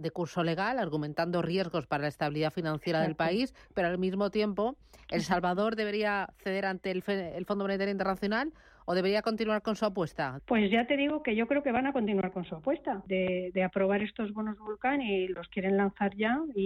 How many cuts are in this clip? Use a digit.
2